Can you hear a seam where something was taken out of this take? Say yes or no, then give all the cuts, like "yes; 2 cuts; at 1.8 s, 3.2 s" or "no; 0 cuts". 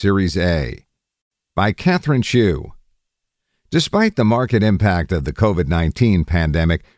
no; 0 cuts